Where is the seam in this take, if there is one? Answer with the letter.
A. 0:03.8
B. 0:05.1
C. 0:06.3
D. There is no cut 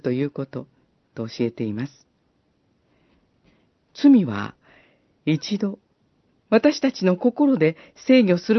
C